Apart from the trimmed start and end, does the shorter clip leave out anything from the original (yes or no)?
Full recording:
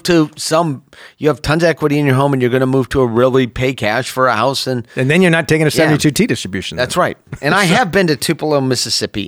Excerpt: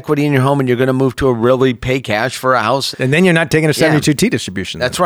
yes